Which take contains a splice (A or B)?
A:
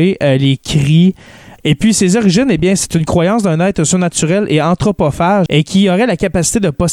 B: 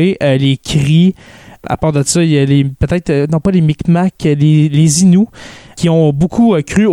A